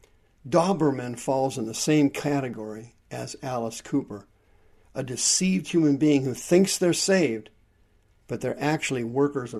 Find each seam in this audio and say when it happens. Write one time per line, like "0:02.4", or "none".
none